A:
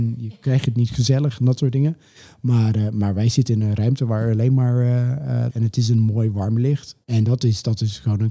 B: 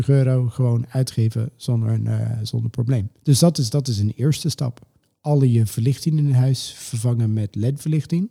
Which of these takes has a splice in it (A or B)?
A